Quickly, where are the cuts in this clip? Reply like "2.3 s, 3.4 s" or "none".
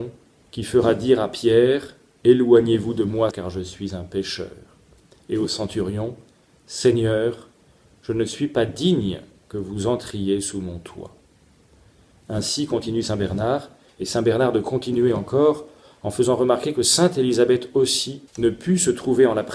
3.3 s, 13.9 s, 18.3 s